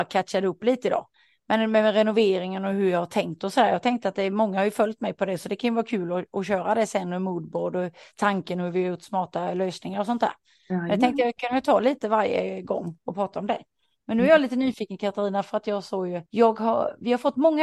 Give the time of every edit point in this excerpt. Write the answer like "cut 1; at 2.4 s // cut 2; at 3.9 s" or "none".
cut 1; at 16.3 s